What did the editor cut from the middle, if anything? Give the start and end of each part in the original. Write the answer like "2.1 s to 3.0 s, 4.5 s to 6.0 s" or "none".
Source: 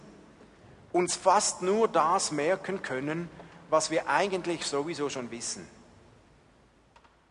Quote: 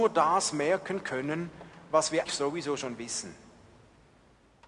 4.0 s to 4.6 s